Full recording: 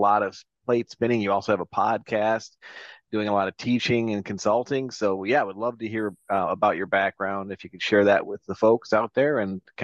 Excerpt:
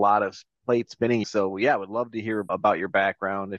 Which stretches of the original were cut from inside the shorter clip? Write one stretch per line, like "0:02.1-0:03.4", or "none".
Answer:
0:01.2-0:04.9
0:06.2-0:06.5